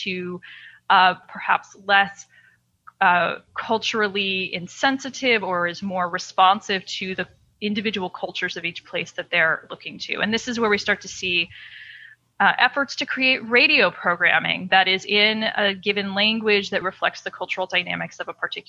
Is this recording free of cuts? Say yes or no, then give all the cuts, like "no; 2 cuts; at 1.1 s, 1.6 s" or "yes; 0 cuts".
no; 2 cuts; at 1.2 s, 16.8 s